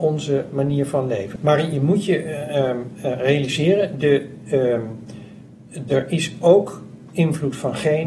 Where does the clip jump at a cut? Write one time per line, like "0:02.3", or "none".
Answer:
0:01.4

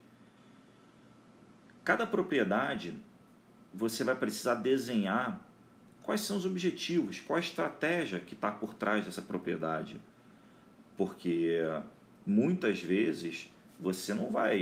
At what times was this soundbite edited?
0:10.8

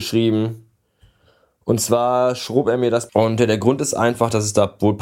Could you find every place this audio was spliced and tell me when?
0:03.1

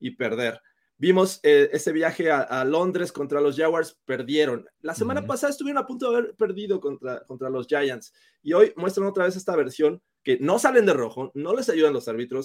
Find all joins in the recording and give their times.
none

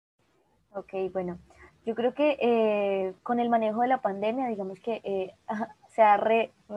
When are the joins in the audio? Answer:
0:03.2

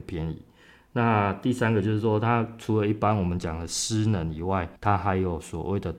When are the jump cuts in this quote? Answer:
0:04.8

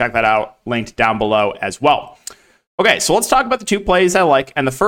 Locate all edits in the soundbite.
none

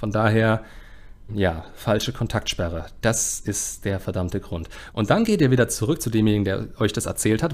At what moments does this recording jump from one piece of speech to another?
0:01.3
0:04.9

